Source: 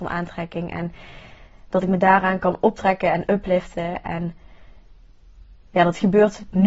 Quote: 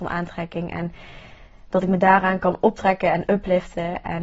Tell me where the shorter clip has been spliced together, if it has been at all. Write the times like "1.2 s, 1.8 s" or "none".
none